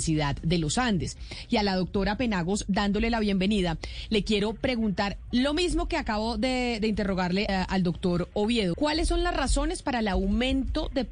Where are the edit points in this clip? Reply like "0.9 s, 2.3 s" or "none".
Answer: 7.5 s, 8.7 s